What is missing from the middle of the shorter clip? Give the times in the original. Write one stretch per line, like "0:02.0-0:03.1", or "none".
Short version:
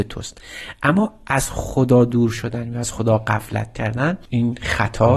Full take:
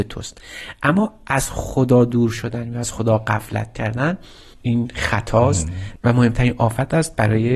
0:04.3-0:04.6